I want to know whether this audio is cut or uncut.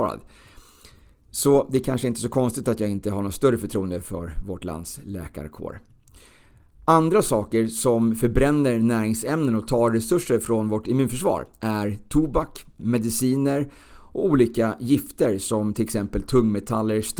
cut